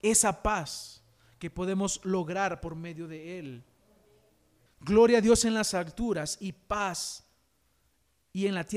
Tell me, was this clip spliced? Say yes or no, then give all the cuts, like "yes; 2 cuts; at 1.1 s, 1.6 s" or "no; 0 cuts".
yes; 1 cut; at 4.7 s